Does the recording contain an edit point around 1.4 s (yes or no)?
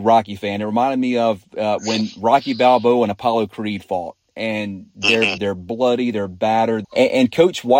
no